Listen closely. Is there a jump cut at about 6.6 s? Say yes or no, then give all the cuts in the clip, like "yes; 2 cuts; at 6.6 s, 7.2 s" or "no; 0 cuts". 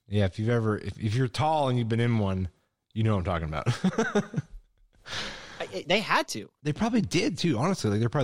yes; 1 cut; at 6.6 s